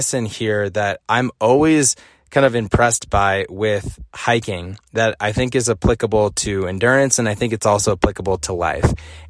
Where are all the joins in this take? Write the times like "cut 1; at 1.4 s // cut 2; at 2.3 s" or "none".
none